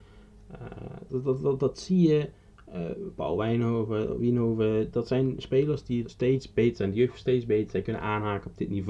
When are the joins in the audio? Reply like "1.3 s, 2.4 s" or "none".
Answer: 1.1 s, 6.0 s